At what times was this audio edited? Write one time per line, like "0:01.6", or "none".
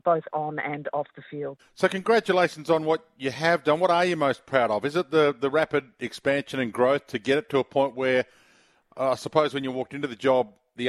0:01.6